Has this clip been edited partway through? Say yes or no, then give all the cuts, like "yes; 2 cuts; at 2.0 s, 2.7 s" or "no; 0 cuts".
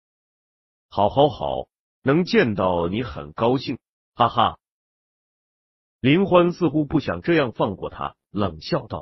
no; 0 cuts